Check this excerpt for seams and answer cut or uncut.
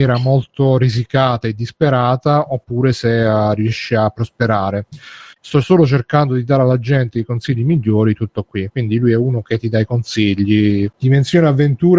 cut